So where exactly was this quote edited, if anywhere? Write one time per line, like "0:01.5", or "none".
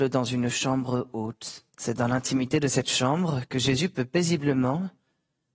0:01.7